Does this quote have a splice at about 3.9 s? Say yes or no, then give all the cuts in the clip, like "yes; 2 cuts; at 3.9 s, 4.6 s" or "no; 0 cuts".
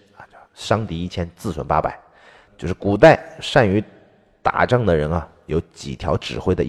no; 1 cut; at 2.5 s